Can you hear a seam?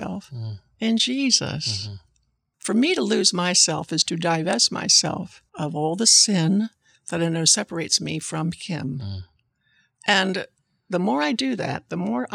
yes; 1 cut; at 5.5 s

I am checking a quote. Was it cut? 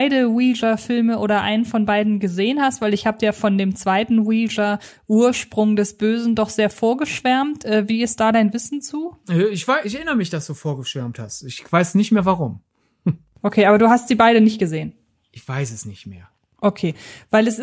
no; 0 cuts

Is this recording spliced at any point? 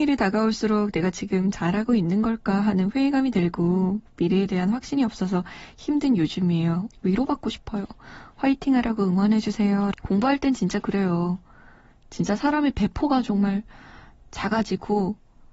yes; 2 cuts; at 6.9 s, 9.9 s

